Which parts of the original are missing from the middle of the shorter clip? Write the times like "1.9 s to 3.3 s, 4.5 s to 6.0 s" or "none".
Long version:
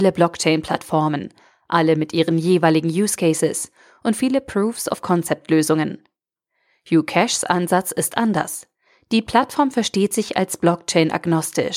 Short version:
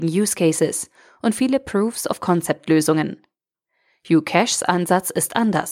none